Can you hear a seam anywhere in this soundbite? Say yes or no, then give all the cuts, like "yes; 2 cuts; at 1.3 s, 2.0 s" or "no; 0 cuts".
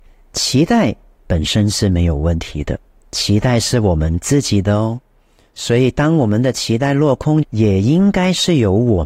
yes; 2 cuts; at 3.0 s, 7.4 s